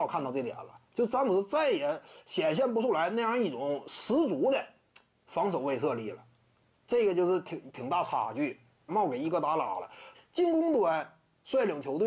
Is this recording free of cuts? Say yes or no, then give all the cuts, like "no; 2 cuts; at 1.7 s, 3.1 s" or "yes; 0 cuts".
no; 2 cuts; at 8.9 s, 10.1 s